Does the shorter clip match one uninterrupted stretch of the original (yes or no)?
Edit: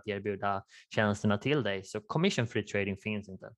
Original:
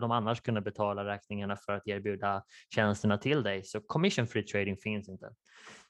yes